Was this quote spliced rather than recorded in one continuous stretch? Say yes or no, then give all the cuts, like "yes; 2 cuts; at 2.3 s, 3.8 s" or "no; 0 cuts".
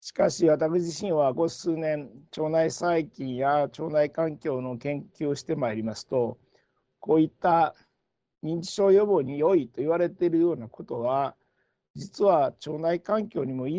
yes; 1 cut; at 1.4 s